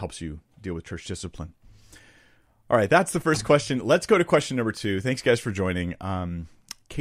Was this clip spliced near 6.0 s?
no; 0 cuts

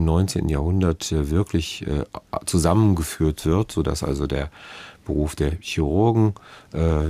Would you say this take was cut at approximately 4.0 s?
no; 0 cuts

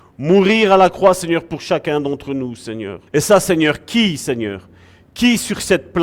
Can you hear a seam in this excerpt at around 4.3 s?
no; 1 cut; at 3.1 s

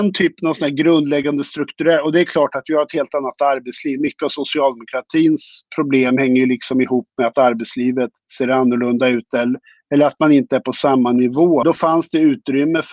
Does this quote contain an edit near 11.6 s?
yes; 1 cut; at 11.6 s

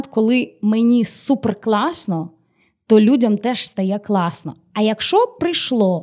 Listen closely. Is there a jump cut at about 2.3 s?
no; 0 cuts

